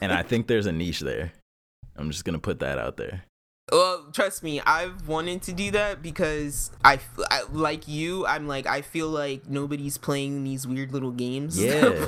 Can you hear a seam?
no; 0 cuts

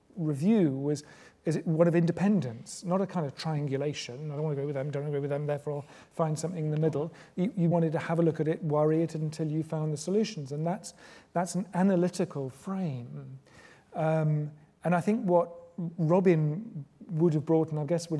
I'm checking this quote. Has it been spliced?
yes; 1 cut; at 7.7 s

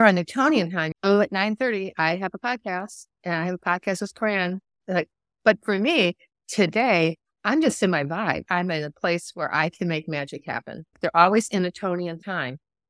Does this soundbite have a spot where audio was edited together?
yes; 3 cuts; at 0.9 s, 8.5 s, 10.9 s

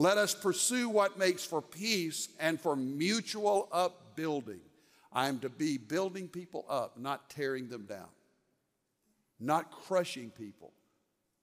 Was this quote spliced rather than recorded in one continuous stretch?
no; 0 cuts

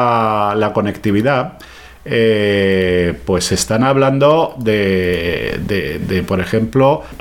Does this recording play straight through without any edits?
no; 1 cut; at 6.0 s

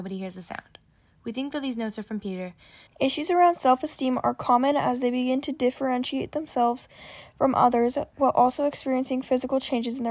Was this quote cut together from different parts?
yes; 1 cut; at 2.9 s

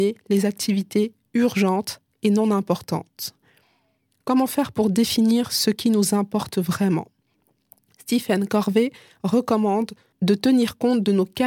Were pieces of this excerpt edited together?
no; 0 cuts

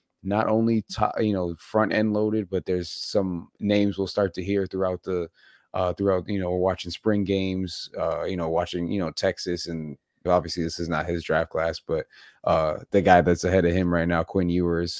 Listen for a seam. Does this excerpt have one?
yes; 1 cut; at 10.2 s

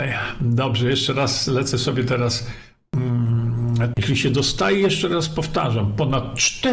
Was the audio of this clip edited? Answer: yes; 1 cut; at 3.9 s

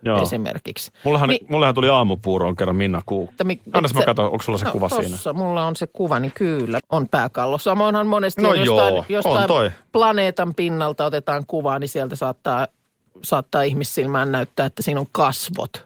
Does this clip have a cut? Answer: yes; 2 cuts; at 3.4 s, 6.8 s

